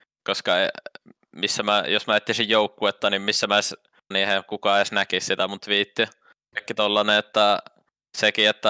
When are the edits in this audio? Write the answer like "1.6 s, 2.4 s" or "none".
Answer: 4.1 s, 6.5 s